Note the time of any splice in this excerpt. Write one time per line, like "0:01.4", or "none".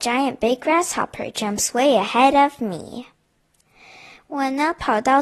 none